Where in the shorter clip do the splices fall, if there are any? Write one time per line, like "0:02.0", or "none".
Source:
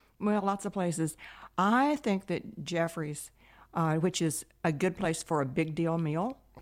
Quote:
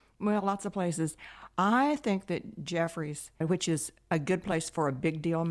0:03.4